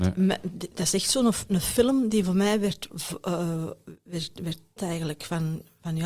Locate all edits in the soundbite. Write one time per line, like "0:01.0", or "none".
0:04.8